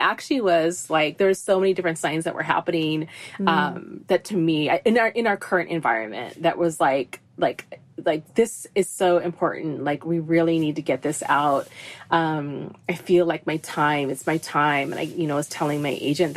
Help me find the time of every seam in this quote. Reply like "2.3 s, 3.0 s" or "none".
none